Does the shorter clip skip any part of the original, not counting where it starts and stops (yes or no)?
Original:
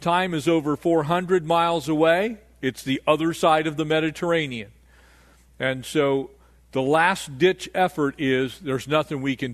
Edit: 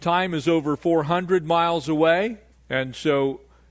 yes